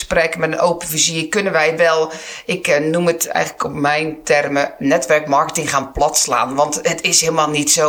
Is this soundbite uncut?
yes; 0 cuts

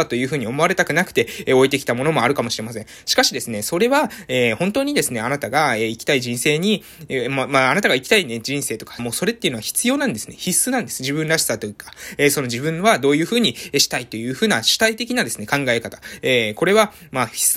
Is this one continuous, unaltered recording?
no; 1 cut; at 9.0 s

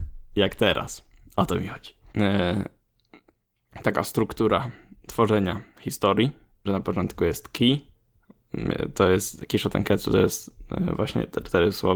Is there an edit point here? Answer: yes; 2 cuts; at 2.1 s, 6.7 s

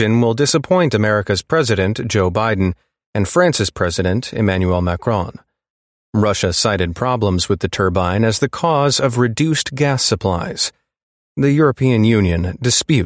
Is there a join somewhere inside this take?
yes; 1 cut; at 6.0 s

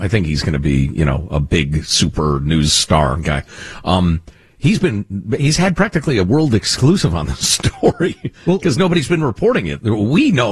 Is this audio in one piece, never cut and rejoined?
yes; 0 cuts

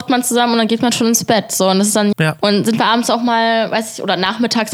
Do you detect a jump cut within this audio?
yes; 1 cut; at 2.1 s

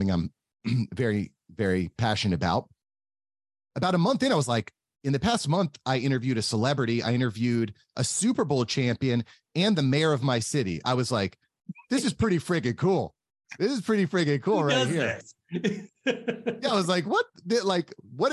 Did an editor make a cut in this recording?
no; 0 cuts

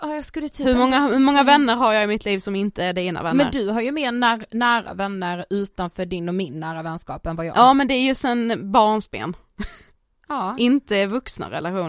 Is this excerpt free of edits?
yes; 0 cuts

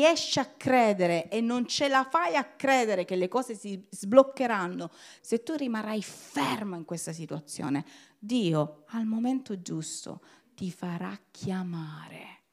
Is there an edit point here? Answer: yes; 1 cut; at 5.2 s

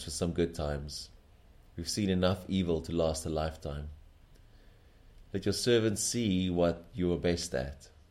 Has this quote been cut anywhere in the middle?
no; 0 cuts

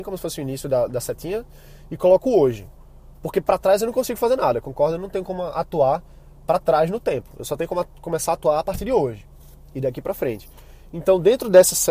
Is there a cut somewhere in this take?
no; 0 cuts

